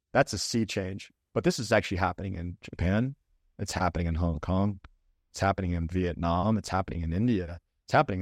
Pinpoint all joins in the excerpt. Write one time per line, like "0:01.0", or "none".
none